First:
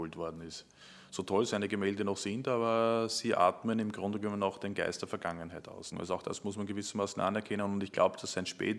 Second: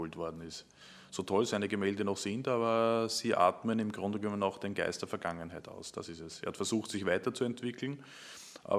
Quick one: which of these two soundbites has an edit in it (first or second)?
first